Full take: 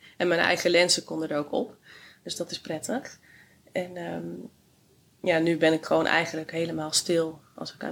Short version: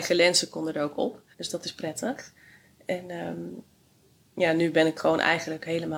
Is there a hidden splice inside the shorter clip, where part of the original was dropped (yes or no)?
yes